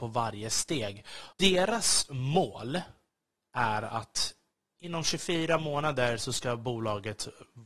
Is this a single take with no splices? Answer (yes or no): no